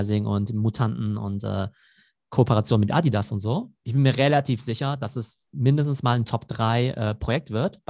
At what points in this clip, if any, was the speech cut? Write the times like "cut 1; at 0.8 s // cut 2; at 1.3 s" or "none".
cut 1; at 3.8 s